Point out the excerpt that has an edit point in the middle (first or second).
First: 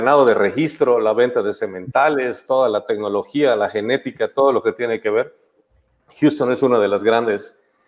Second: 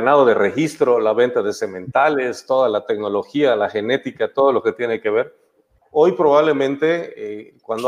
second